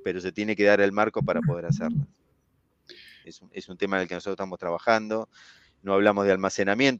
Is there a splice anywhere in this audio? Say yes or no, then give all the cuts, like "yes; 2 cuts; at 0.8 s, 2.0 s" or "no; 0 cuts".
yes; 1 cut; at 3.2 s